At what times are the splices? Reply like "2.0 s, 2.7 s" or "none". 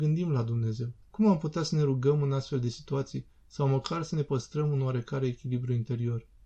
1.0 s